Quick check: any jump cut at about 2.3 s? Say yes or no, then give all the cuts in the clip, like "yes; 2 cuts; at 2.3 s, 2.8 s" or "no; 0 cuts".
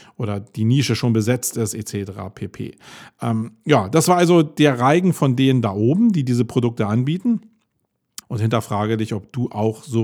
no; 1 cut; at 8.2 s